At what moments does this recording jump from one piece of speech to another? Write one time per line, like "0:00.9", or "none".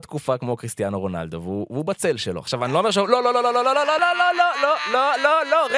0:04.0